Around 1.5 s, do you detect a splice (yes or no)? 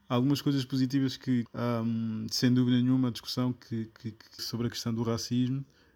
yes